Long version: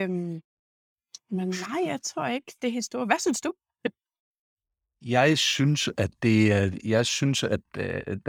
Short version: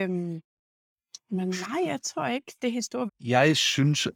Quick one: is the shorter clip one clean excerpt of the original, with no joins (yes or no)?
no